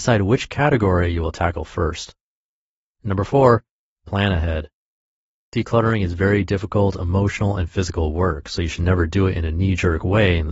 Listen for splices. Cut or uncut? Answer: uncut